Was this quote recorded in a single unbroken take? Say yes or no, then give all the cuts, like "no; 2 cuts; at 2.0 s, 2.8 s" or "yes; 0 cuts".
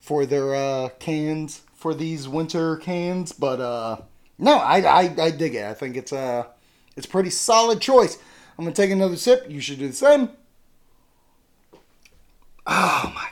yes; 0 cuts